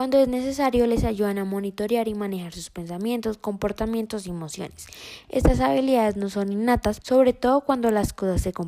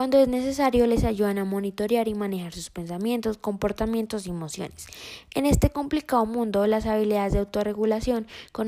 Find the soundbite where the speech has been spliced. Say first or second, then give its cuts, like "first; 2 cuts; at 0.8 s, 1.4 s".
first; 2 cuts; at 5.2 s, 7.0 s